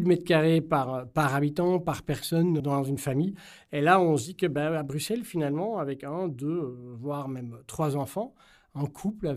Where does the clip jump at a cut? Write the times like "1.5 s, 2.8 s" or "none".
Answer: 2.6 s